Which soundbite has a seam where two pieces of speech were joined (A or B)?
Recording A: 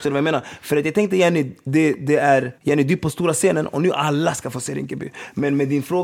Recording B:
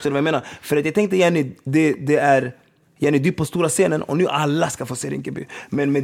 A